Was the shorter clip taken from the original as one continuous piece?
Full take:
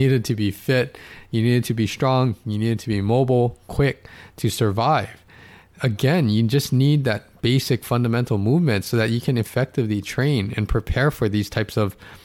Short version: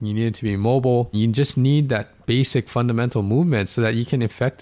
no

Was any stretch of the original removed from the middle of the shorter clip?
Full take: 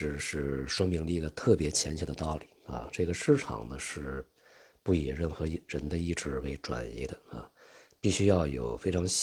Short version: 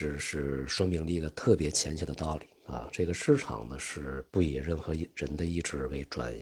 yes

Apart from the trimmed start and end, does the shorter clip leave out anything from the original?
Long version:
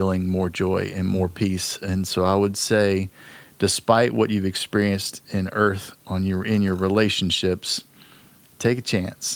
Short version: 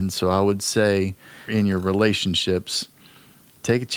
yes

